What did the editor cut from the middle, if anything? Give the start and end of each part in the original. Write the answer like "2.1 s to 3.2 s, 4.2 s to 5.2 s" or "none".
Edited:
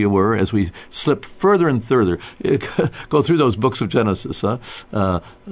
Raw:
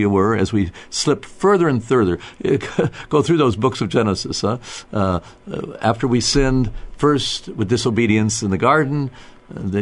none